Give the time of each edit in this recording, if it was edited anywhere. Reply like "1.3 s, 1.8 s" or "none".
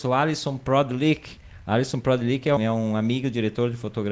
2.6 s